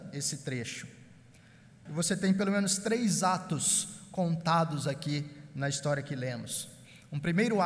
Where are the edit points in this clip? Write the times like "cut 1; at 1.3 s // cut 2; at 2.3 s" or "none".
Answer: cut 1; at 1.9 s